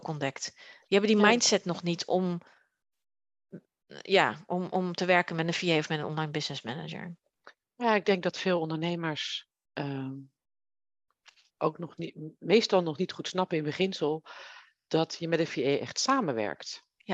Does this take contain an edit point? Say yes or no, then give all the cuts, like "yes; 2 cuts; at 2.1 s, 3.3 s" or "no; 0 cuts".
no; 0 cuts